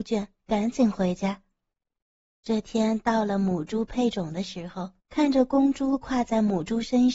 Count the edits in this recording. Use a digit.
2